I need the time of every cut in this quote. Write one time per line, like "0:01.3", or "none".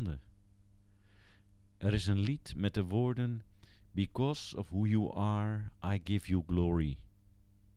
none